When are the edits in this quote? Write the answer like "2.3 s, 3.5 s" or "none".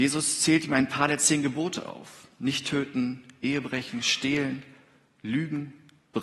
none

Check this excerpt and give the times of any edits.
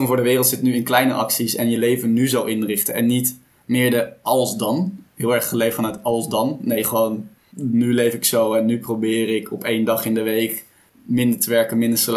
none

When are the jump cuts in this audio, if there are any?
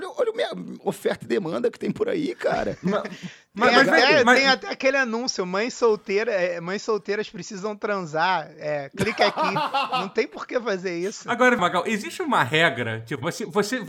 11.6 s

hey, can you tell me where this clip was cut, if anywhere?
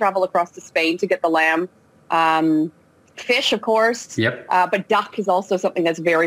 none

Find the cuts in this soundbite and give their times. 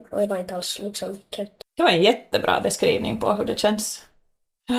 1.6 s

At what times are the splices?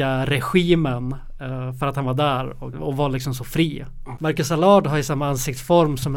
2.7 s, 4.2 s

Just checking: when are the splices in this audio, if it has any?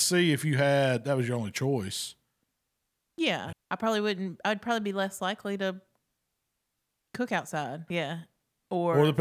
3.5 s, 7.9 s

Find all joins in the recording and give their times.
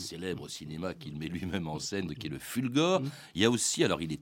2.1 s

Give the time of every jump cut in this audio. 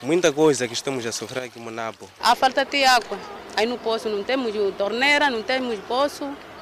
2.2 s

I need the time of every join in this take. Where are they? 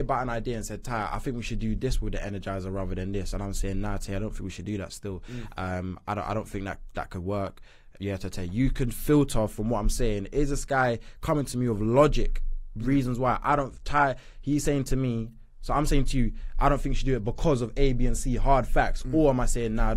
none

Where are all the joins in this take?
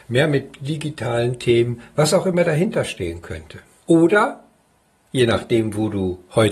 3.8 s

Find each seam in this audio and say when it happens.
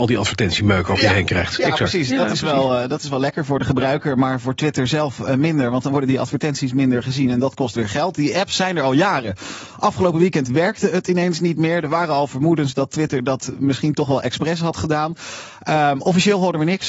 none

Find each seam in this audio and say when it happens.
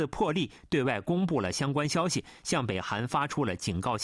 none

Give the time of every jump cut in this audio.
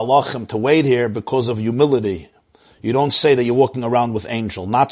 none

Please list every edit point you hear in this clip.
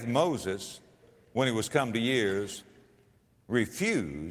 none

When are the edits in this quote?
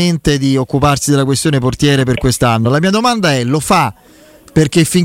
none

